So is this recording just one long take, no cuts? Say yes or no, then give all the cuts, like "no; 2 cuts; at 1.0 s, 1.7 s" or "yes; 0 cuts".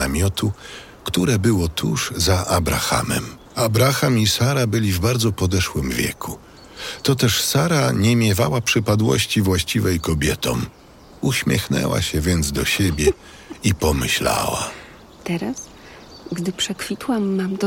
no; 1 cut; at 3.4 s